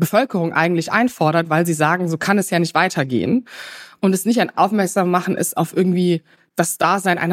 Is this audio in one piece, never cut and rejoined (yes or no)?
yes